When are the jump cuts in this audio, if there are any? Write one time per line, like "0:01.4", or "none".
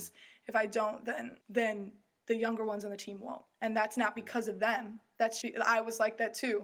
0:01.4
0:05.4